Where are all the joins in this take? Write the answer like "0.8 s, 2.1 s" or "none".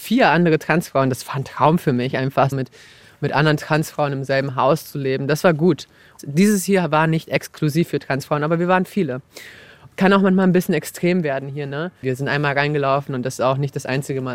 2.5 s, 12.0 s